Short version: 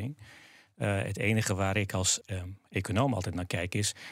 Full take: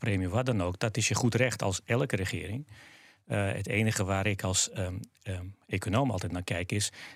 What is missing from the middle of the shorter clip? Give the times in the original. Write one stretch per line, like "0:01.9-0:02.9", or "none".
0:04.7-0:05.2